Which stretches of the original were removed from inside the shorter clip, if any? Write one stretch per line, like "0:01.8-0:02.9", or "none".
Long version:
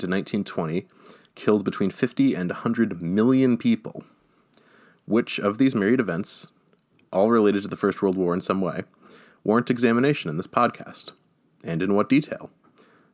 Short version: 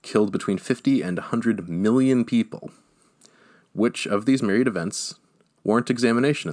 0:06.9-0:09.4